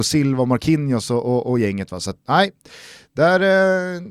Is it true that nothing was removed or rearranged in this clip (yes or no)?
no